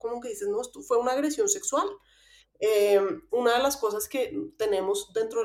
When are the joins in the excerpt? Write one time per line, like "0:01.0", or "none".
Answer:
0:03.3

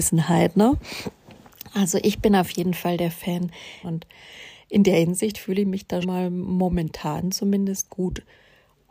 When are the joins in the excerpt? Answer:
0:03.8
0:06.0

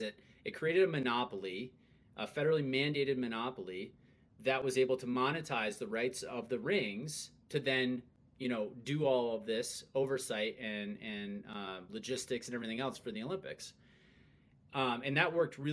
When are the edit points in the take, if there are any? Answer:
none

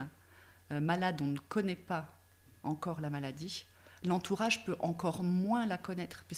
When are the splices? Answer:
none

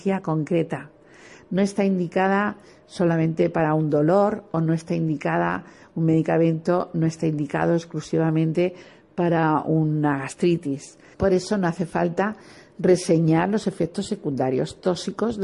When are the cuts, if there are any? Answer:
0:11.1

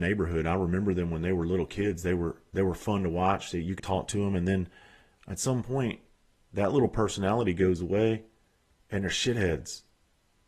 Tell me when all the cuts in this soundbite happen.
0:03.8

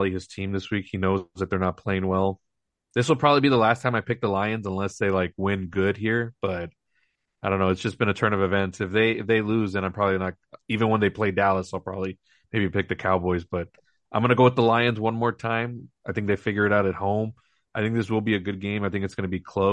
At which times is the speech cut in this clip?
none

